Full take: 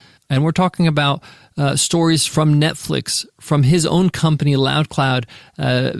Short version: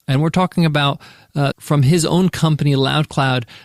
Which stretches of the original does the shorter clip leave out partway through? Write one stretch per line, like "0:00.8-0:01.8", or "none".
0:01.7-0:03.3